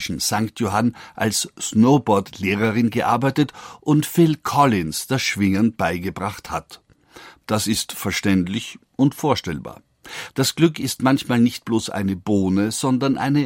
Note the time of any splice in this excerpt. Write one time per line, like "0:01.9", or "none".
0:07.4
0:10.3